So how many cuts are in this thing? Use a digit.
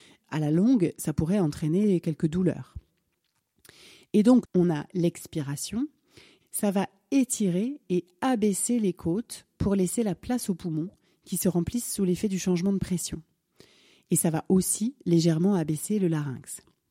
2